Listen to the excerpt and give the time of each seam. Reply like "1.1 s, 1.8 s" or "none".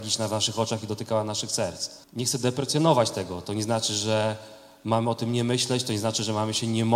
2.0 s